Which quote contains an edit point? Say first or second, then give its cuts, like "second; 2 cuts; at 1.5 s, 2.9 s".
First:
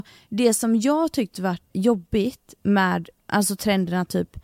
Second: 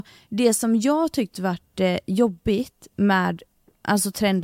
first; 2 cuts; at 1.7 s, 3.2 s